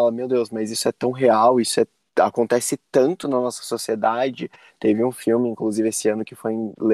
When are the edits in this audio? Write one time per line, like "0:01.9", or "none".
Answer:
0:04.7